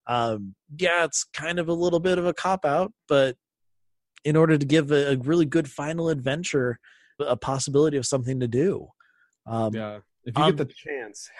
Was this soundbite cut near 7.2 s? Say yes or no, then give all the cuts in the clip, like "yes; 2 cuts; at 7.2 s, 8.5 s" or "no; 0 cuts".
yes; 1 cut; at 7.2 s